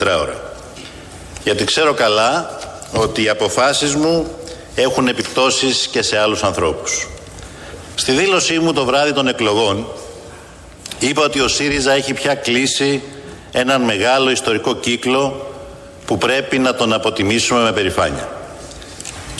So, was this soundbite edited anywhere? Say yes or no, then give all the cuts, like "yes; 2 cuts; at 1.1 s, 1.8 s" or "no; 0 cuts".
yes; 1 cut; at 7.9 s